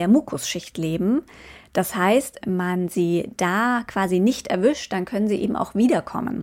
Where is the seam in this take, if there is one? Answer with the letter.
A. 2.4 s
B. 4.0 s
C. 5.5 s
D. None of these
A